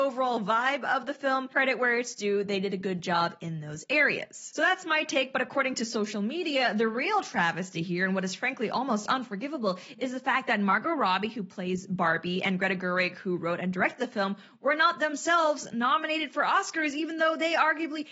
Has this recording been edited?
no; 0 cuts

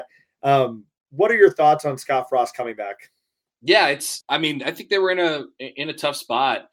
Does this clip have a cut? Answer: yes; 1 cut; at 4.2 s

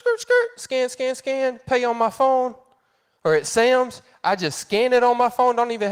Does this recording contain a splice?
no; 0 cuts

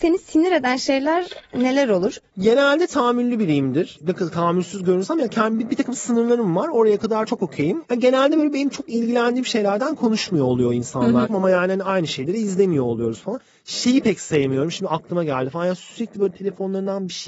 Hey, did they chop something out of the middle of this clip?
yes; 2 cuts; at 2.3 s, 11.3 s

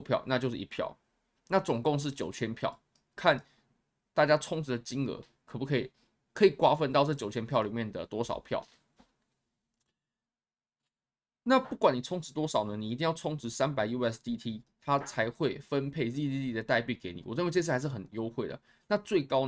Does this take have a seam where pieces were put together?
no; 0 cuts

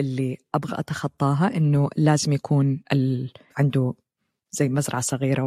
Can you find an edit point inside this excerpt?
yes; 1 cut; at 3.5 s

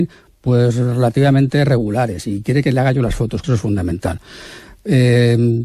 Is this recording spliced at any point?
yes; 1 cut; at 3.4 s

